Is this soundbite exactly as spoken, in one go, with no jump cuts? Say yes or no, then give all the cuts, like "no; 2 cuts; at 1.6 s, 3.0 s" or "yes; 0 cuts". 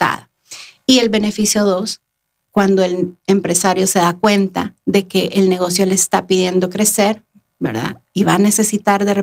no; 1 cut; at 2.4 s